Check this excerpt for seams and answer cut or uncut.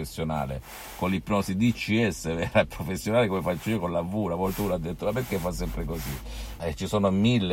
cut